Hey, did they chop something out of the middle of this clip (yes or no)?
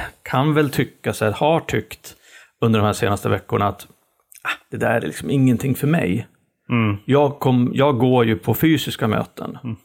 no